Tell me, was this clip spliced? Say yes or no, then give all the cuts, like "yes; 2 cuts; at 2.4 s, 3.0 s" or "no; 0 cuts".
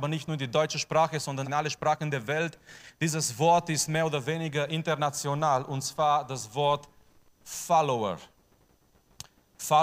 yes; 1 cut; at 1.4 s